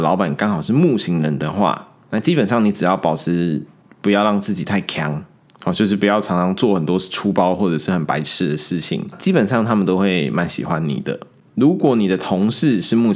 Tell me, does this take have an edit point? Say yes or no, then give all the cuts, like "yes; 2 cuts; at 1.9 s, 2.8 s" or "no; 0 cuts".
no; 0 cuts